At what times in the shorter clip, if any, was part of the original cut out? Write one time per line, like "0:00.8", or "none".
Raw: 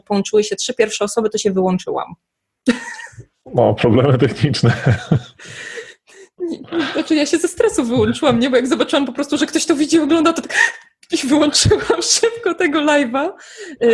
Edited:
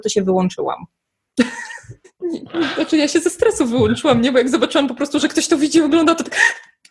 0:02.0